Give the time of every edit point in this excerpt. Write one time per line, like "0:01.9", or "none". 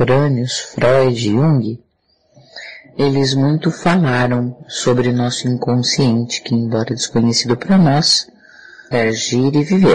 0:08.9